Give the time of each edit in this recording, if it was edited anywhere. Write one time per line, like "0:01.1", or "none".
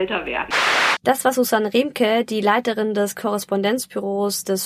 none